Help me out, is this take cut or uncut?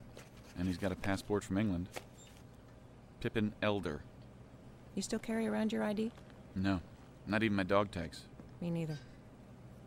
uncut